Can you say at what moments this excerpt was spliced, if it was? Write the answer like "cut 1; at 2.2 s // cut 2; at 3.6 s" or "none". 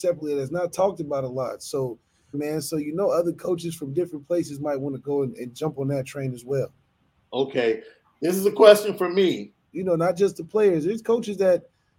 cut 1; at 2.3 s // cut 2; at 9.7 s